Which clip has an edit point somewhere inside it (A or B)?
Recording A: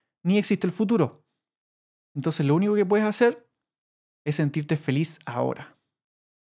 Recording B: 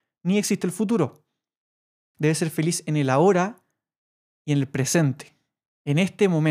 B